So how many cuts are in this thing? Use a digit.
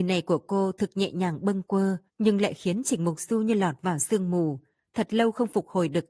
1